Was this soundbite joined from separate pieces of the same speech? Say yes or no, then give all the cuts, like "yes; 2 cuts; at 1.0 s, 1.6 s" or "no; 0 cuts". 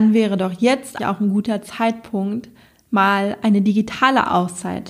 yes; 1 cut; at 1.0 s